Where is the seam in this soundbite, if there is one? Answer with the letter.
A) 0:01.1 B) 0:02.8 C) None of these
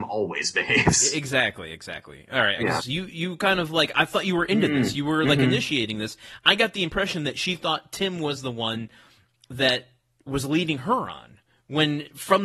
B